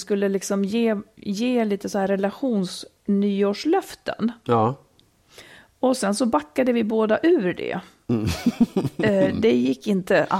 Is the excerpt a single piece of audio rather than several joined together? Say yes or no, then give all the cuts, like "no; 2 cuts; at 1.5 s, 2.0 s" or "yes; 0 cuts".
yes; 0 cuts